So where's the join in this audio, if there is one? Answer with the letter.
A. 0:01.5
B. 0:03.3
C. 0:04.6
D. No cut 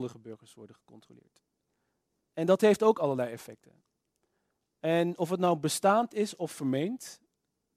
D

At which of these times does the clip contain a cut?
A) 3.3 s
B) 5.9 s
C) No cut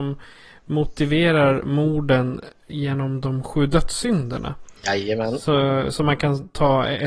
B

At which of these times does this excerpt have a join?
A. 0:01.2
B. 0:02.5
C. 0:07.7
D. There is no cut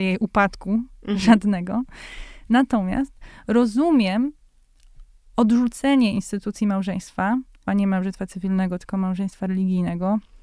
C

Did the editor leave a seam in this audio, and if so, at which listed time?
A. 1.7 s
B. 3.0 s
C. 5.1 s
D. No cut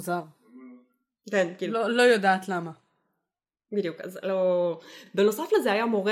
D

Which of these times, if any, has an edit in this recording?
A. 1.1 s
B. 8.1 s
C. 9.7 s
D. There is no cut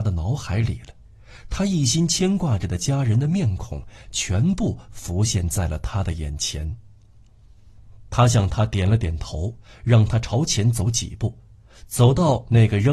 D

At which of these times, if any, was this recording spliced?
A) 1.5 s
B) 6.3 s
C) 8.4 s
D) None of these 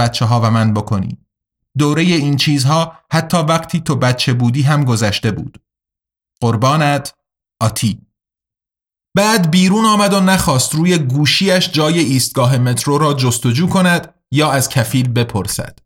D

